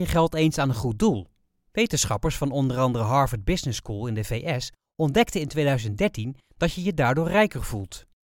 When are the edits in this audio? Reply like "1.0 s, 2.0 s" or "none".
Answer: none